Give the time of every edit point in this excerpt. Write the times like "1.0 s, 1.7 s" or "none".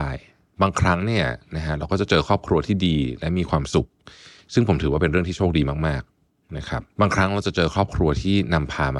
6.9 s